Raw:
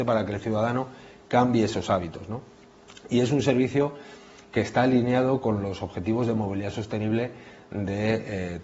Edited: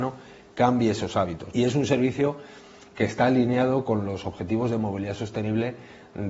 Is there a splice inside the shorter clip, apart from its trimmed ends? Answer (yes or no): yes